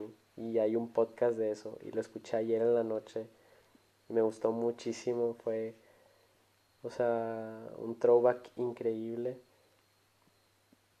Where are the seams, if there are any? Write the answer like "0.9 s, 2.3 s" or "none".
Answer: none